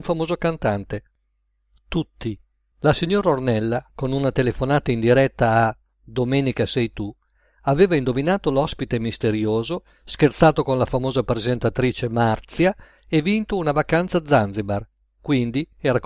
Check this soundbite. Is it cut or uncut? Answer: cut